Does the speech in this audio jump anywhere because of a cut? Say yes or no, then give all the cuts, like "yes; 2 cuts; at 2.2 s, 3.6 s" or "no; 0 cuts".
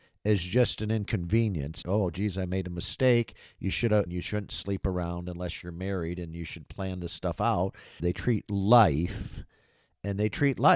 yes; 3 cuts; at 1.8 s, 4.1 s, 8.0 s